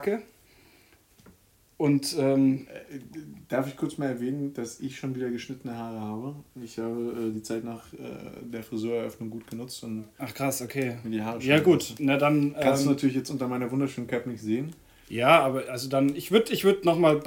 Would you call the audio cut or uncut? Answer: uncut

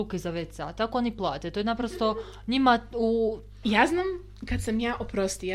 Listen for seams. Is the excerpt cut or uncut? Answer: cut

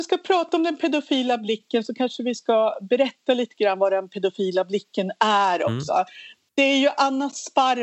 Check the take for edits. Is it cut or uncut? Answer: uncut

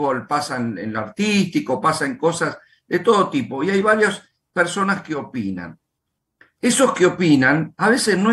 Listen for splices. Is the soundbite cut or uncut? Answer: uncut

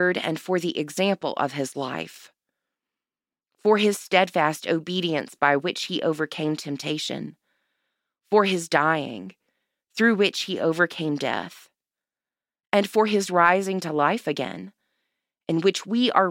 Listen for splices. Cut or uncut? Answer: uncut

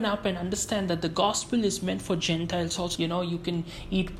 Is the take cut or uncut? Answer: cut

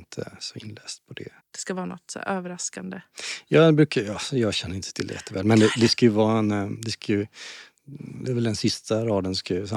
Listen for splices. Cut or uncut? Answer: cut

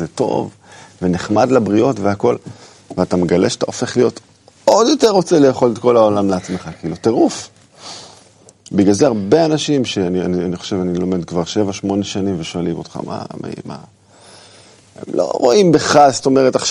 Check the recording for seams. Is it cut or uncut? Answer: uncut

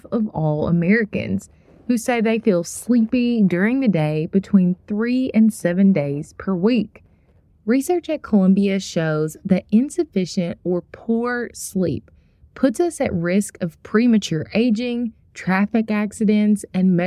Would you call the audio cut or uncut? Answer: cut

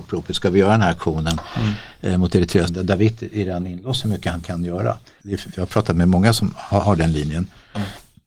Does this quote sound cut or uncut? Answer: cut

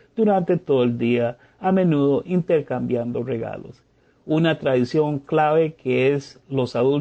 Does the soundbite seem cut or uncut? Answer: uncut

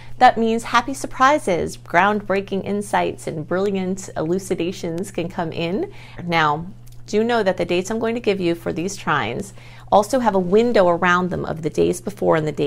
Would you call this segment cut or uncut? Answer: cut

